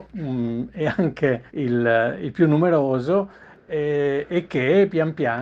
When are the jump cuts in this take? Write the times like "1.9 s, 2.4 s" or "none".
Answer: 1.5 s